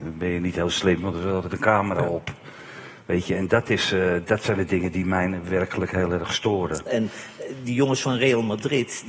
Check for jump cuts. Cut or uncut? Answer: cut